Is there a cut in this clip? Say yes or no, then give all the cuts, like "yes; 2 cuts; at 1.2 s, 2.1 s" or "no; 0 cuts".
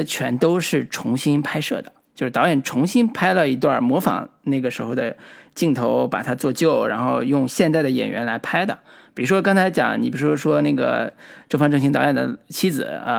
no; 0 cuts